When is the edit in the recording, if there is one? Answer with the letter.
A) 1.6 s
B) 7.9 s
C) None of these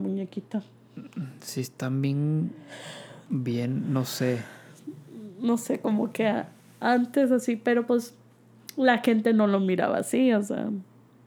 C